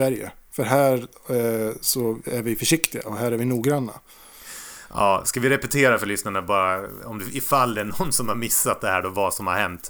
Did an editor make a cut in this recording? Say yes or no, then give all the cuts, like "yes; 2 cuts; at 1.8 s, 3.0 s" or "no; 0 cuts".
no; 0 cuts